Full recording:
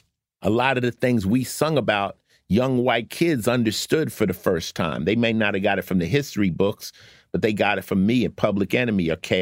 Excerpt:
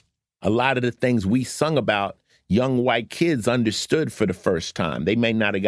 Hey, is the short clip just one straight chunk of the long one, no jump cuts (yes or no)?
yes